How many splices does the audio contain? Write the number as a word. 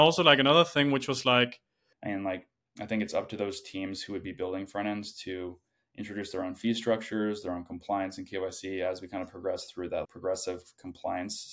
two